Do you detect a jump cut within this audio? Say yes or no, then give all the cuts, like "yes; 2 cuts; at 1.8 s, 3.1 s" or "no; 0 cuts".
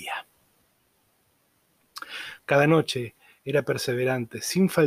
yes; 1 cut; at 2.4 s